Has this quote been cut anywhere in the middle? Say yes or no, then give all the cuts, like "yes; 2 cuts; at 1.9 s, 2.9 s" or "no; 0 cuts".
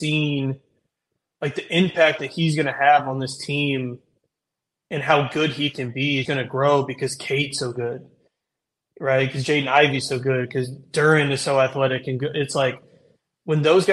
yes; 1 cut; at 6.2 s